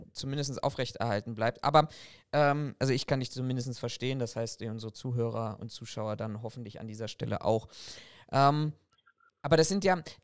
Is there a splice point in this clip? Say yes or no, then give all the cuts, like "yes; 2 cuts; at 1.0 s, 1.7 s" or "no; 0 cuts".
no; 0 cuts